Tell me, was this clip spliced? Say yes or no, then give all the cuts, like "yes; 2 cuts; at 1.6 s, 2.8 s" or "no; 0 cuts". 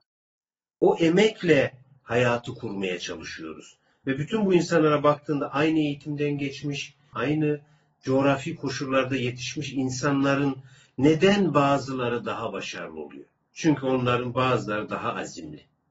yes; 1 cut; at 7.1 s